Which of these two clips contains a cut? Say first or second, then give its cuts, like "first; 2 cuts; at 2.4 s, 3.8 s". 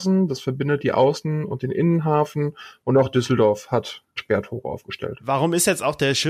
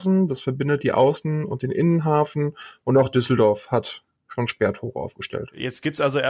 first; 2 cuts; at 4.2 s, 5.2 s